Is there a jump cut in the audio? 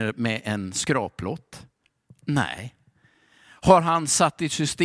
no; 0 cuts

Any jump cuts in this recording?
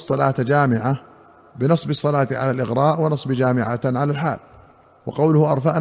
no; 0 cuts

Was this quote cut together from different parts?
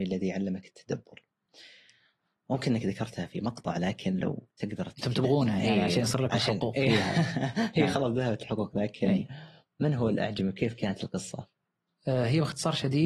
no; 0 cuts

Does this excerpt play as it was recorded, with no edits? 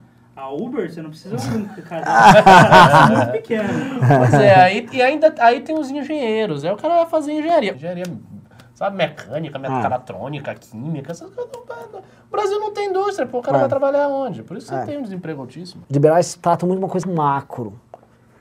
no; 3 cuts; at 7.7 s, 15.8 s, 17.0 s

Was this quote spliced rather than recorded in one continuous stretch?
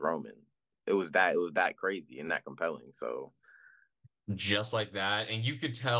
yes; 1 cut; at 4.3 s

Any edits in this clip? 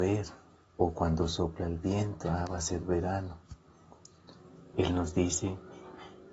yes; 1 cut; at 4.7 s

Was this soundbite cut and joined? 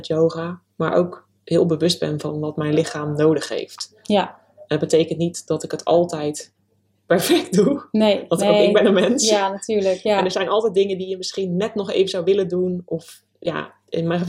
no; 0 cuts

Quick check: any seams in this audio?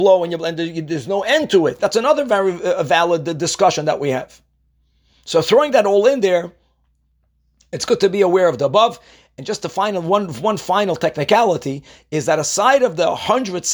yes; 1 cut; at 1.8 s

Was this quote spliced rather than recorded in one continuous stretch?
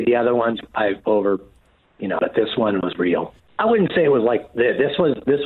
yes; 2 cuts; at 2.2 s, 3.4 s

